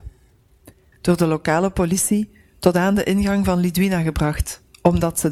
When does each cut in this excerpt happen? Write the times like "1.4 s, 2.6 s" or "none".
0.9 s